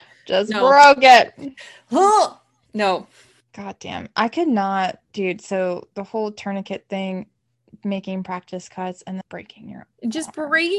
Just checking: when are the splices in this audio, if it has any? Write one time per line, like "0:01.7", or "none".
0:09.2